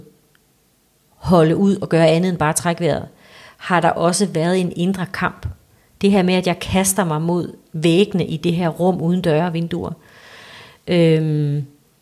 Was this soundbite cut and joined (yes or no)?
no